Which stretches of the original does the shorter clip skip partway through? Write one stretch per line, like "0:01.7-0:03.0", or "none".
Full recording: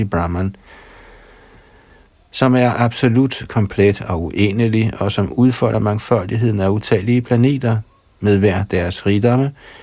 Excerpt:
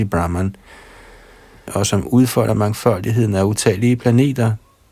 0:01.7-0:04.9